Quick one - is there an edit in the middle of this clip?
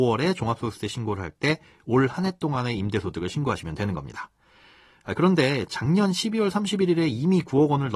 no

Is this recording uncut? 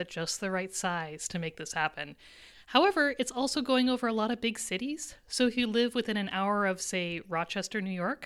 no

